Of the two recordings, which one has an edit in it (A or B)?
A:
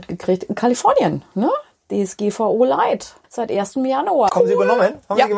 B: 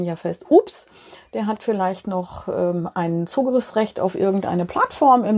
A